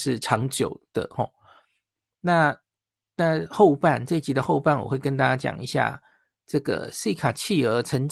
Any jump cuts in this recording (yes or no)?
no